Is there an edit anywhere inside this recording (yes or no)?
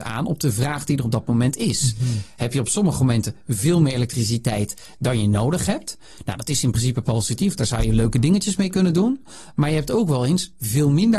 no